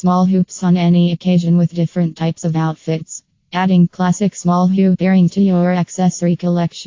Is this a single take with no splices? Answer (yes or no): no